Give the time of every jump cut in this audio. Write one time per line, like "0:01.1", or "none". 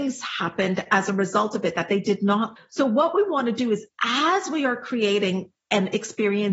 0:02.6